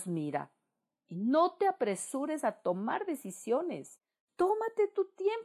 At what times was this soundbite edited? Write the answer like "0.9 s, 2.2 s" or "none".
none